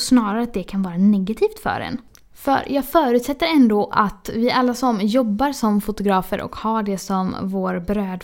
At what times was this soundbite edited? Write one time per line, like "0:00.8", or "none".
none